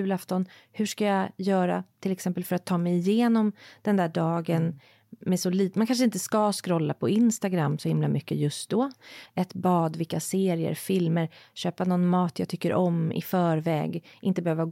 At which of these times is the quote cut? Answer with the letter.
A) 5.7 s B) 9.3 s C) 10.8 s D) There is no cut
B